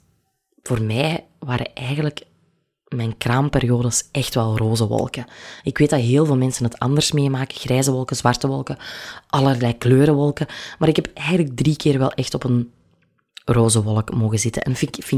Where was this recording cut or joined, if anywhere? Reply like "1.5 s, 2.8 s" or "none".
none